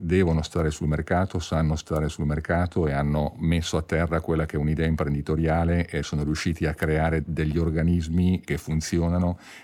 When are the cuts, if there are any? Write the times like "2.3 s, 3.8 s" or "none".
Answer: none